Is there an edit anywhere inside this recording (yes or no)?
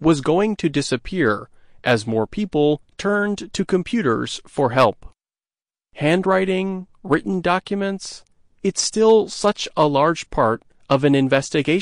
yes